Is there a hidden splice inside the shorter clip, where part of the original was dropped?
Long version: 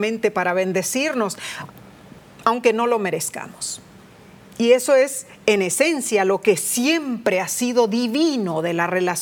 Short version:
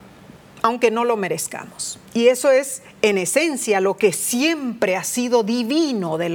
yes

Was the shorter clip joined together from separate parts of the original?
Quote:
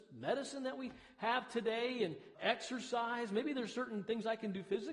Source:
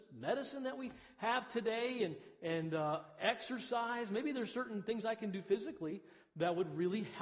yes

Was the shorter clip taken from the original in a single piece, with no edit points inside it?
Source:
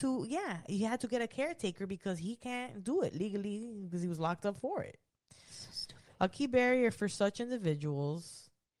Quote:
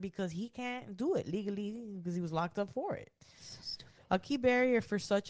no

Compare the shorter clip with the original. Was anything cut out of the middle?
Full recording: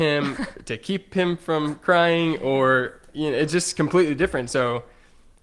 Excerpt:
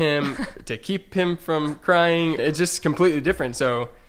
yes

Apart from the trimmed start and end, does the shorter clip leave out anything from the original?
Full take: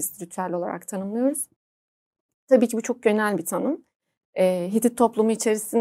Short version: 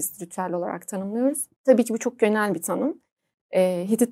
yes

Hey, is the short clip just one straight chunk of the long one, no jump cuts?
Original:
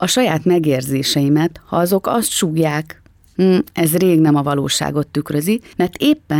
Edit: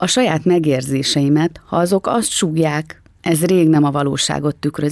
no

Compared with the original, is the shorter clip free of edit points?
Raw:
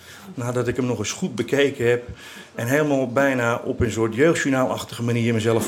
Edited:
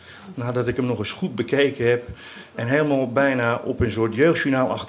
yes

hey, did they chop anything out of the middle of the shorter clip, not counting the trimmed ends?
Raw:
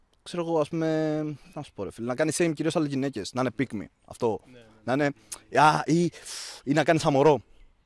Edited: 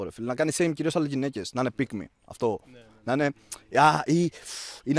no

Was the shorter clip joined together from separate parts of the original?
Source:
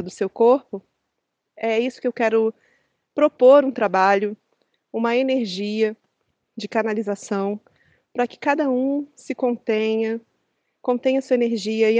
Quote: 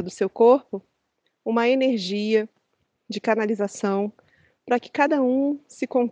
yes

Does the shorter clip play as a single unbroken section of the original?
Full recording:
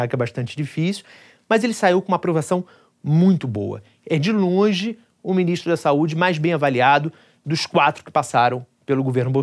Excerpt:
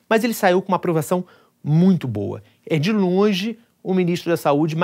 yes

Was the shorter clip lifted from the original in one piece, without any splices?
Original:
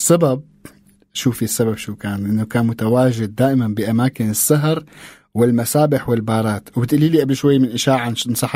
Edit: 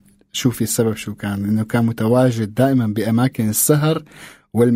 yes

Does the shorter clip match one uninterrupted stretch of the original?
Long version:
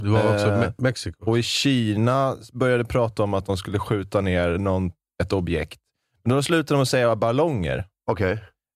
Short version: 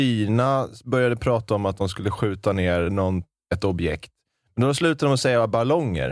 yes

